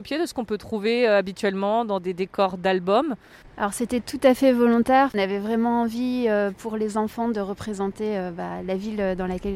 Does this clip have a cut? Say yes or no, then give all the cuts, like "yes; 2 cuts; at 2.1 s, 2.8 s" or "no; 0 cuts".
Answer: no; 0 cuts